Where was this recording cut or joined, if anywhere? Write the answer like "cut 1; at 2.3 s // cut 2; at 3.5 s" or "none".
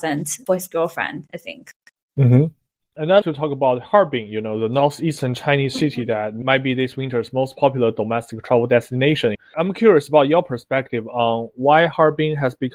cut 1; at 3.2 s